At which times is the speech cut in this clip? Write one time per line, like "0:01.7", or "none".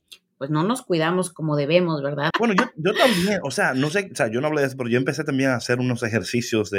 0:02.3